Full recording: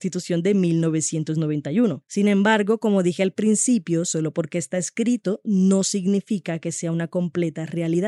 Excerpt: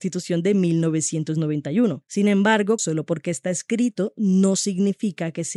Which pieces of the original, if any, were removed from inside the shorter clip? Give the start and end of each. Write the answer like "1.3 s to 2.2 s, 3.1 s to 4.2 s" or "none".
2.8 s to 4.1 s